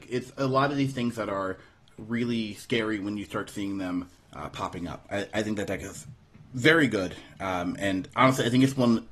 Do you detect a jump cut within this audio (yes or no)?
yes